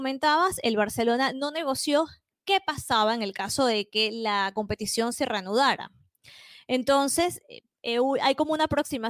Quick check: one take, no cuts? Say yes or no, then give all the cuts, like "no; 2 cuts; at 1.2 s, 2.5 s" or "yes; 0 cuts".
yes; 0 cuts